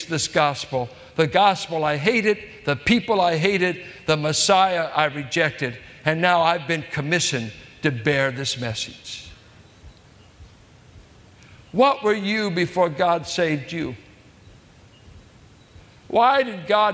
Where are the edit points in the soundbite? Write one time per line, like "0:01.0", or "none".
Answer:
none